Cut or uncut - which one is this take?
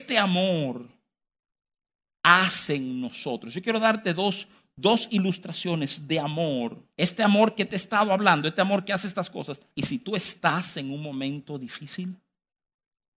cut